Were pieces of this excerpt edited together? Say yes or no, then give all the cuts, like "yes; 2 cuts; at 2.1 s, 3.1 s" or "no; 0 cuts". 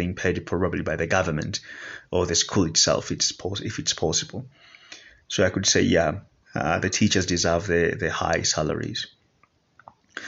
no; 0 cuts